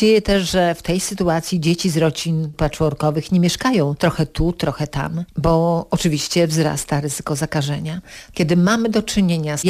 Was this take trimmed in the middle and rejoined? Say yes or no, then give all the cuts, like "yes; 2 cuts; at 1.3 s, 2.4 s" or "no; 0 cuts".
no; 0 cuts